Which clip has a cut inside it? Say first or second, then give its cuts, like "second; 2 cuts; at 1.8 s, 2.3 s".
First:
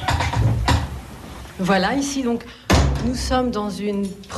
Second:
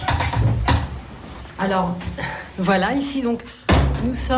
first; 1 cut; at 1.5 s